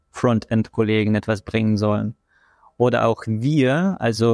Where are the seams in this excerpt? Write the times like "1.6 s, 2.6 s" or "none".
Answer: none

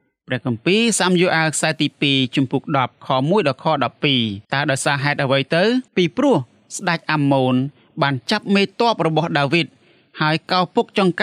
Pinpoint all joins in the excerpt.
4.4 s, 5.9 s

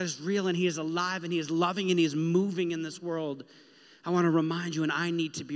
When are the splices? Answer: none

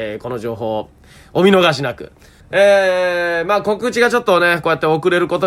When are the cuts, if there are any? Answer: 2.4 s

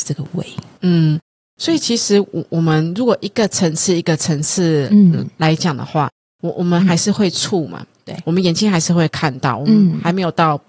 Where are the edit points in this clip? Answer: none

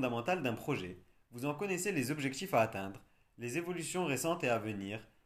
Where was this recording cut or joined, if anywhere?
none

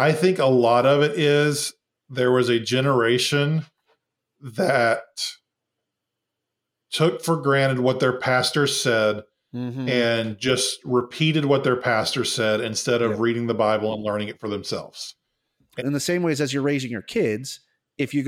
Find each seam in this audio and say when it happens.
15.8 s

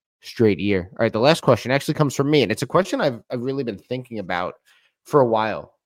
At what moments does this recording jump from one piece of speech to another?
none

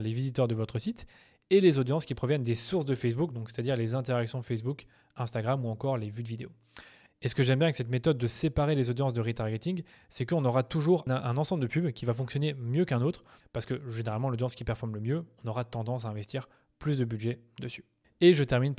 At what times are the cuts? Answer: 11.1 s, 13.4 s

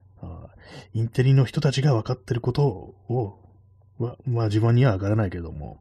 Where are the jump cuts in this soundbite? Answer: none

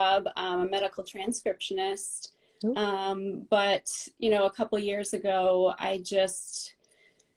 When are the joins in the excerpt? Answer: none

